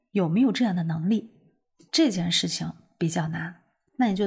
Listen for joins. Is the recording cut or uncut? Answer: uncut